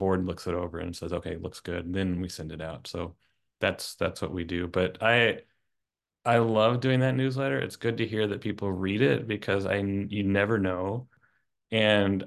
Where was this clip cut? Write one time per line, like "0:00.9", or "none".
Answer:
none